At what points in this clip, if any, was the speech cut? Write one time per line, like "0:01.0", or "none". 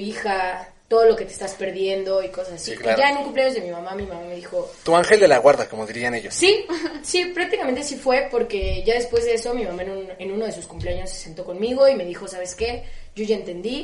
none